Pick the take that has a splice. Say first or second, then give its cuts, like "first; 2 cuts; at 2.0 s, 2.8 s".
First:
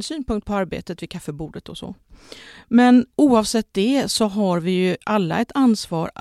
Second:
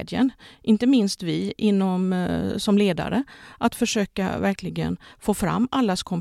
first; 1 cut; at 3.1 s